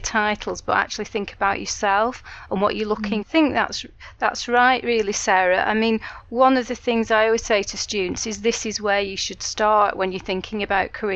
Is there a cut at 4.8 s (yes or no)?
no